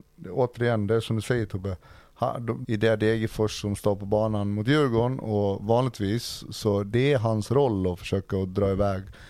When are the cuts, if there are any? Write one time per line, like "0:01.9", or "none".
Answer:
0:02.6